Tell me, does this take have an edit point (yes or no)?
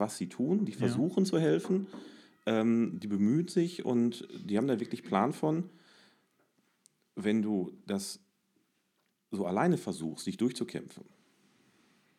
no